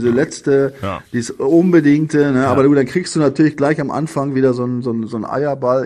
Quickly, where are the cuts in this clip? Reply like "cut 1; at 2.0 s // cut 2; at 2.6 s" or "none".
none